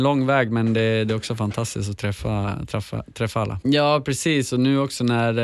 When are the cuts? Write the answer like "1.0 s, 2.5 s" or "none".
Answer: 3.6 s